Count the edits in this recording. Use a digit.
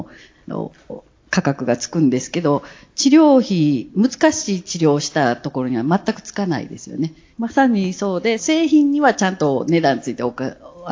2